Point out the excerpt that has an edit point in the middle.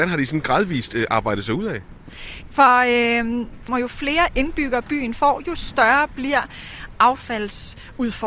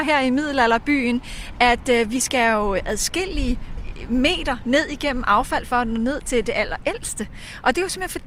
first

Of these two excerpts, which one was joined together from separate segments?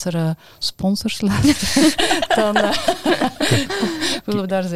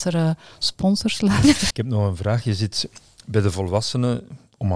second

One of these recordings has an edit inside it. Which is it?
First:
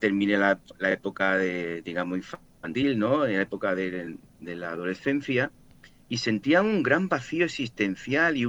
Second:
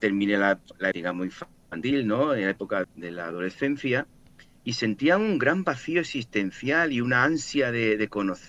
second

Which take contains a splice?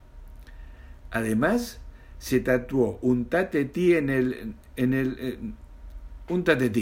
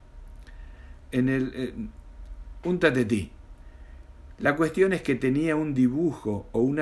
second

